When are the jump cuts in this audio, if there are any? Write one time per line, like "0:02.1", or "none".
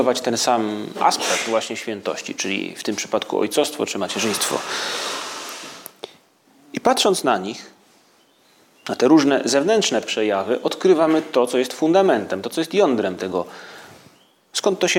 none